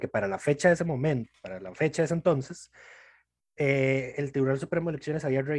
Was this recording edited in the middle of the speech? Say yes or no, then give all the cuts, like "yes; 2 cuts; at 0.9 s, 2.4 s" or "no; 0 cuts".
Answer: no; 0 cuts